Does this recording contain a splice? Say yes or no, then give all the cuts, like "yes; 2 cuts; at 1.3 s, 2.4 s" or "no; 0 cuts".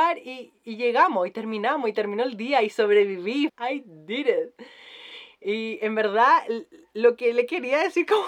yes; 1 cut; at 3.5 s